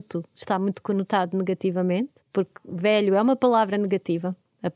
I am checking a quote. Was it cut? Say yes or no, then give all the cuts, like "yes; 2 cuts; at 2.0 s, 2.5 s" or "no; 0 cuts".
yes; 1 cut; at 2.2 s